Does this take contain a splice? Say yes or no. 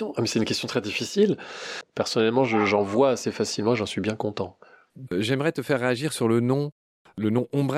yes